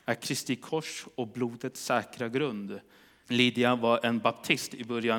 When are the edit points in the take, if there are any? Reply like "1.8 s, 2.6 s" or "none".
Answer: 3.2 s